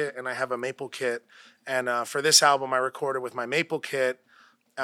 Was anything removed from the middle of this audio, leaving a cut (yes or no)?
no